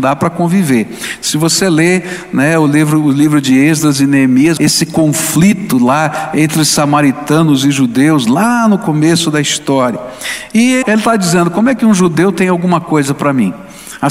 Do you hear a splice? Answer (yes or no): yes